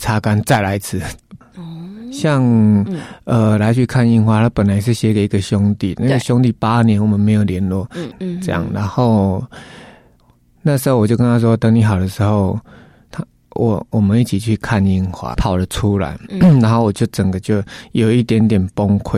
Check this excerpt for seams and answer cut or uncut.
cut